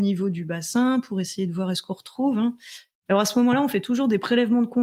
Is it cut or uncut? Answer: uncut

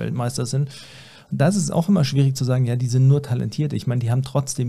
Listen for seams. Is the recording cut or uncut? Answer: uncut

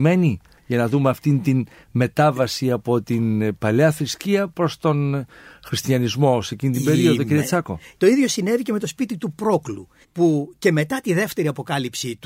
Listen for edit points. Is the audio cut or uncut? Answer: cut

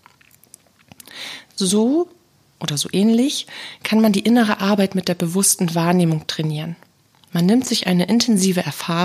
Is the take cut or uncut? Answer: uncut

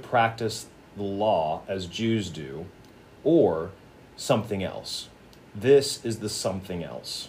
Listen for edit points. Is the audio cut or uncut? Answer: uncut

